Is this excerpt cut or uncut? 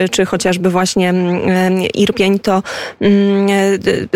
uncut